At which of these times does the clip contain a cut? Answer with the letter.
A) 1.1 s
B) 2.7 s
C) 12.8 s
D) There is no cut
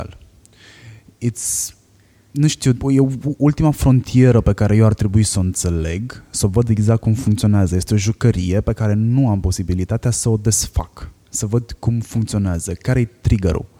B